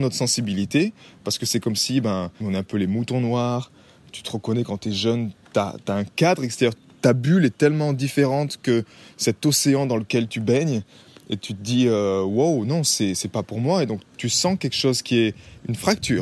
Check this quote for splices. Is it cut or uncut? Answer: cut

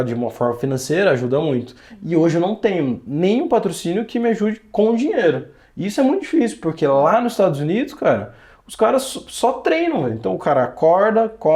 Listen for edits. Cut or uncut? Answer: uncut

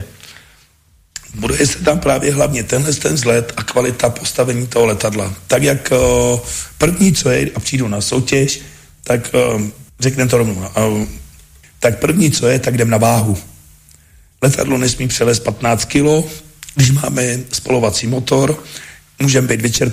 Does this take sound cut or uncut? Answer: cut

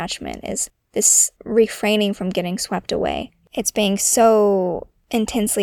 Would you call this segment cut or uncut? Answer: uncut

